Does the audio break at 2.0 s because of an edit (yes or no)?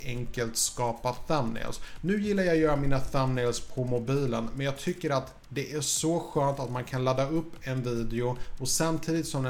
no